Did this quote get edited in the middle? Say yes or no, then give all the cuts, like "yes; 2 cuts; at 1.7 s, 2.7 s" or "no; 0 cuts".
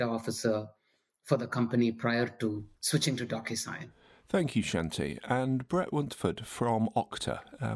yes; 1 cut; at 2.7 s